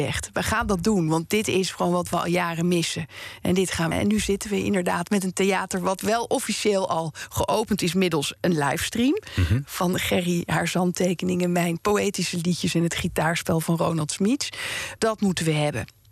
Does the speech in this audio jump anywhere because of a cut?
yes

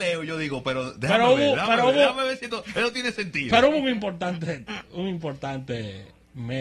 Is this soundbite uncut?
yes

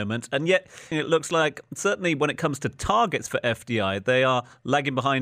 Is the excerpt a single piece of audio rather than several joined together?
no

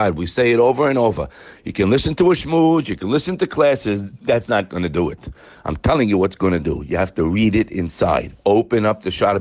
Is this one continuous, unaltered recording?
yes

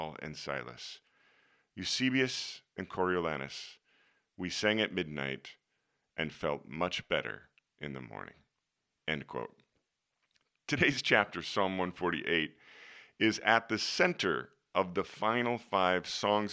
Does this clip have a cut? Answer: no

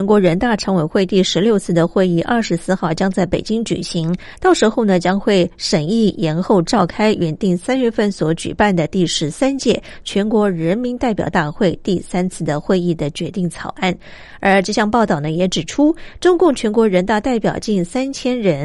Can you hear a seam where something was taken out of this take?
no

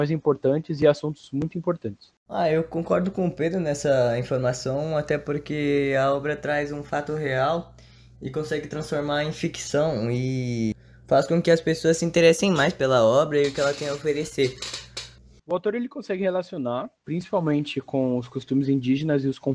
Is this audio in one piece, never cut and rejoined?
no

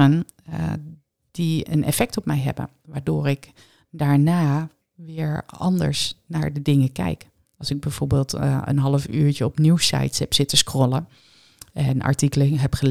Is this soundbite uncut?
yes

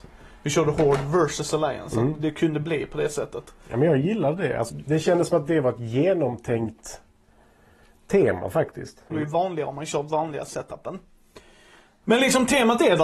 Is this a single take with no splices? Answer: no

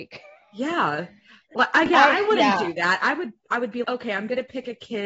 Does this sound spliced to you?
yes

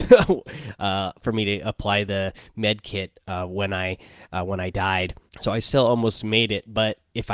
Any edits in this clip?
yes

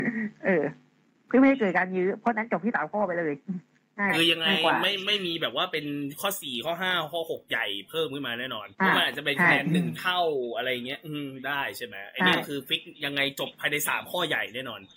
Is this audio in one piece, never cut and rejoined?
no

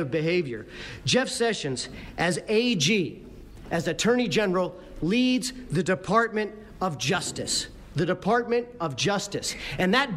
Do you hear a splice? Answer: no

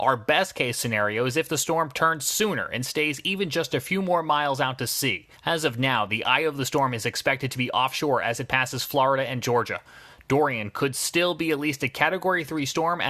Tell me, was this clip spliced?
yes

